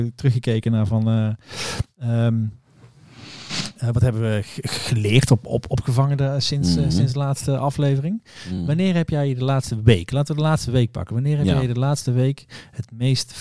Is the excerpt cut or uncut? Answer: uncut